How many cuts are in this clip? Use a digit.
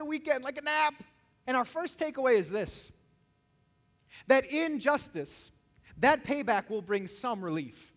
1